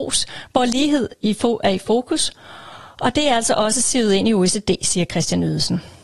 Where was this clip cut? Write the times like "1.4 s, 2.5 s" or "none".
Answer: none